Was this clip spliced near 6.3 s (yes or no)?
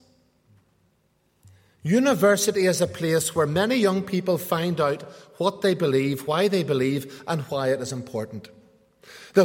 no